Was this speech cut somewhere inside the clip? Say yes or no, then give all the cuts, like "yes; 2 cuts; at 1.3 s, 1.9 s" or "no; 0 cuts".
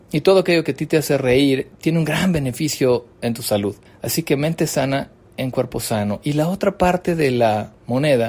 no; 0 cuts